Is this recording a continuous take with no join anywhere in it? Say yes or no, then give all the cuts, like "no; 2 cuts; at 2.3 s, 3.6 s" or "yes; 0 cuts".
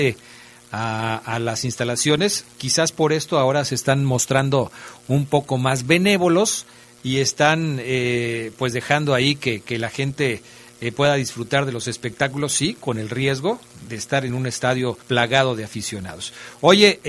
no; 2 cuts; at 13.9 s, 15.0 s